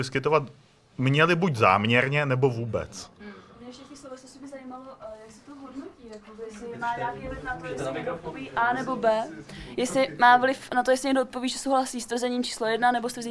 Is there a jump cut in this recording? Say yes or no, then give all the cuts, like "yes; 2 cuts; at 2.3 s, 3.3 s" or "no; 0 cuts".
no; 0 cuts